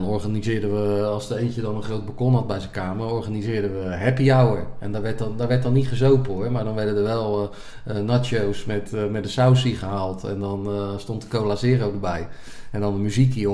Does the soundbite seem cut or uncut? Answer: uncut